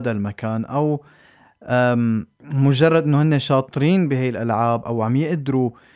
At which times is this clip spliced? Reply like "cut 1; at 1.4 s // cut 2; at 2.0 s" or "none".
cut 1; at 4.8 s